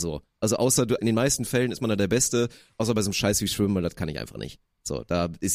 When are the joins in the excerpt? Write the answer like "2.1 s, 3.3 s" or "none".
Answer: 1.0 s